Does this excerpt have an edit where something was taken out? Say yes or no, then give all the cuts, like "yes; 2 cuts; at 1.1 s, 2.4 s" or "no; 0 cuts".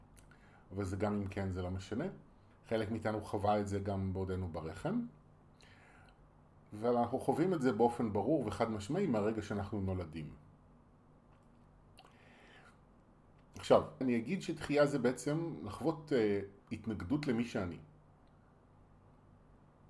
yes; 3 cuts; at 2.5 s, 14.0 s, 16.6 s